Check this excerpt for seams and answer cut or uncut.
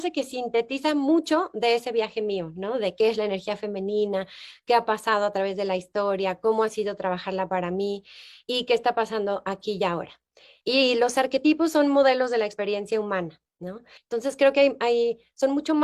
cut